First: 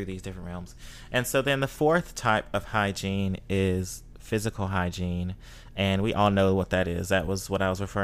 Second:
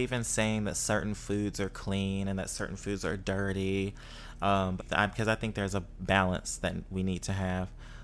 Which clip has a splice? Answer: second; 1 cut; at 4.8 s

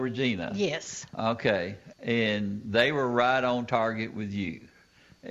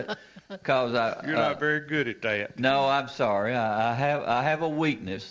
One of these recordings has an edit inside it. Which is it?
first; 1 cut; at 1.9 s

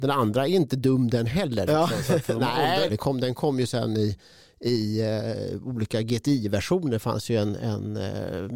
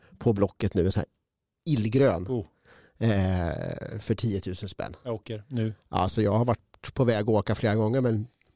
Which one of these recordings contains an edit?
first; 2 cuts; at 1.7 s, 2.9 s

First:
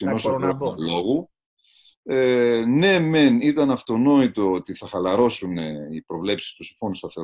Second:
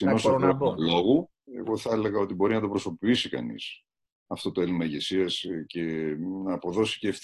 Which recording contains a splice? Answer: second; 1 cut; at 1.5 s

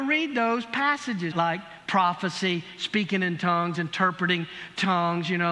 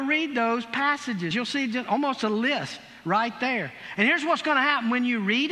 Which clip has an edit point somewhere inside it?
first; 1 cut; at 1.3 s

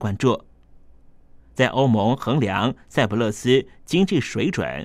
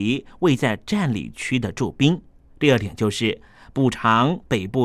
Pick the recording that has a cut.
second; 1 cut; at 2.5 s

